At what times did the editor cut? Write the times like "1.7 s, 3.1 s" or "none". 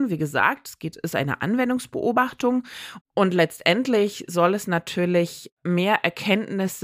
3.0 s

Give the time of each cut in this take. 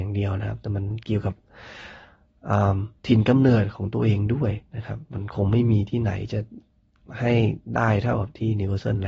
3.0 s, 4.7 s

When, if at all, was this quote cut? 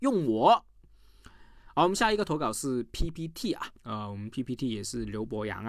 3.8 s

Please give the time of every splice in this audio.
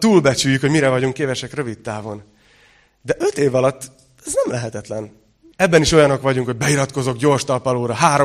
5.5 s

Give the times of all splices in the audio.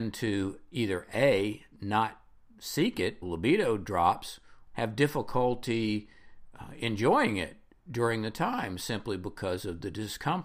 3.2 s, 4.7 s

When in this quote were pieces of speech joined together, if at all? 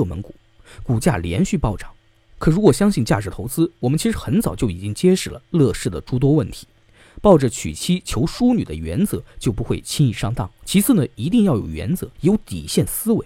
10.6 s, 12.1 s

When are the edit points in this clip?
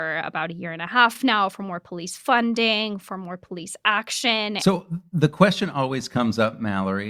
none

